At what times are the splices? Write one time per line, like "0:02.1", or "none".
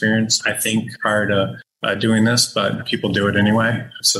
none